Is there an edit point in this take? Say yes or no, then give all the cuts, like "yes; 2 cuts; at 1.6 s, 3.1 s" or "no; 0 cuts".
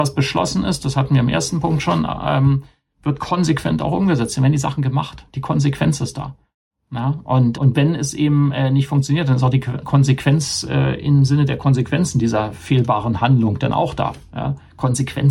yes; 1 cut; at 7.5 s